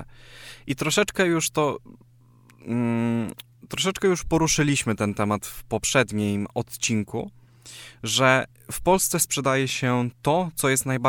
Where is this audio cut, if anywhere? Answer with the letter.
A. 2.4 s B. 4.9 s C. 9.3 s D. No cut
D